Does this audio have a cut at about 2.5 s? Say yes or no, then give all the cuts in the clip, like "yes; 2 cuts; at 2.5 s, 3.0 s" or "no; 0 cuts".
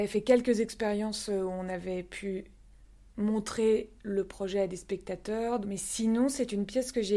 no; 0 cuts